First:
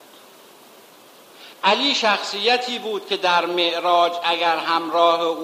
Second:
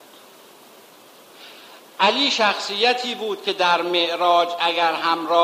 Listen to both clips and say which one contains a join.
first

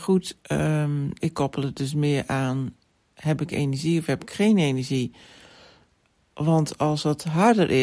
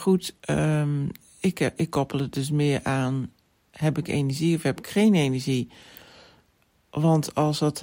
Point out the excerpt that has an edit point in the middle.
first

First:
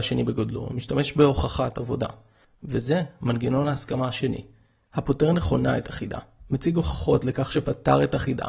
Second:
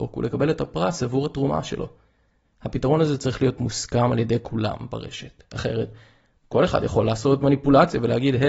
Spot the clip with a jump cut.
first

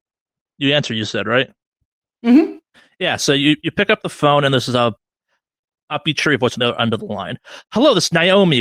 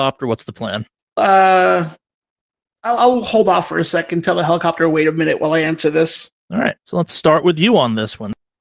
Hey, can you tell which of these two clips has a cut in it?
second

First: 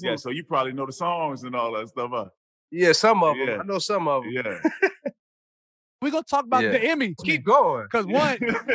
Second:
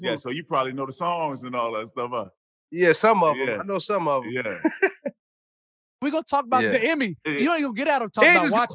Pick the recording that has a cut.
first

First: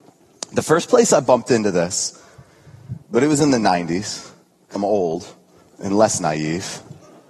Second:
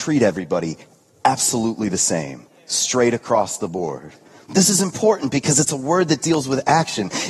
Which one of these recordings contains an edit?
first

